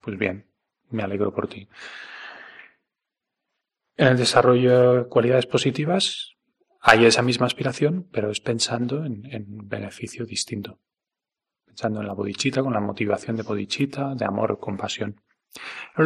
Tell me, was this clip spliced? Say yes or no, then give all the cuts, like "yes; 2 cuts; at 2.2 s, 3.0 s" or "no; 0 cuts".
no; 0 cuts